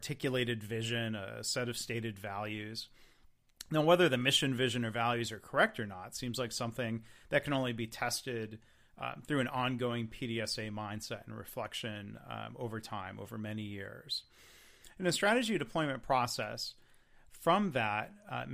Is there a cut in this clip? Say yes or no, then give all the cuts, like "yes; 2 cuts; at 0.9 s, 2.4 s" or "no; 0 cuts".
no; 0 cuts